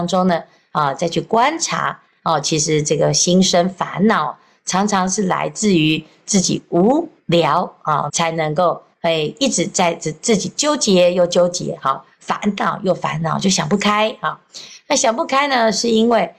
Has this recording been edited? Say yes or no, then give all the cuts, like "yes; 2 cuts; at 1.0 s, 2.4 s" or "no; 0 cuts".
yes; 1 cut; at 8.1 s